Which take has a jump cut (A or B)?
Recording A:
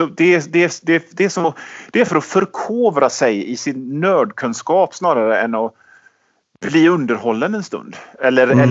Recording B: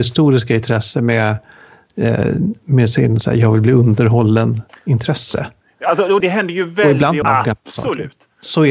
B